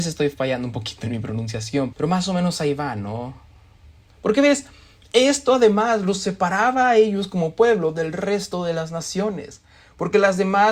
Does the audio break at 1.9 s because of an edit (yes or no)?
yes